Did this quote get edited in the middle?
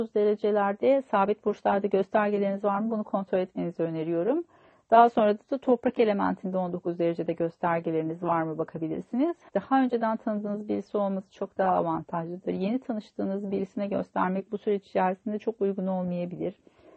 yes; 1 cut; at 9.5 s

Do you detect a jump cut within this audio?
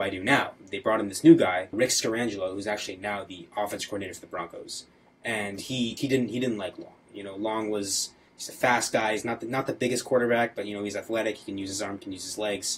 no; 0 cuts

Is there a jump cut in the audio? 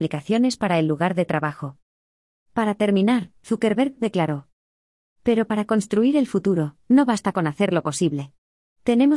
yes; 1 cut; at 3.4 s

